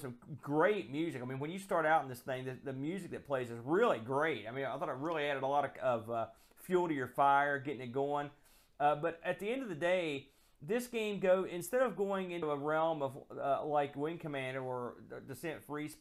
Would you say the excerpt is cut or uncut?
uncut